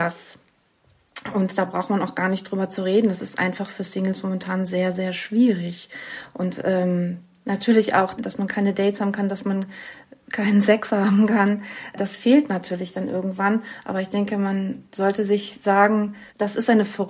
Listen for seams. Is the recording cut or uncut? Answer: uncut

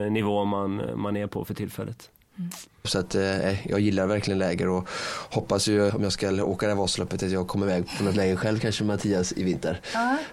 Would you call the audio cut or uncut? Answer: cut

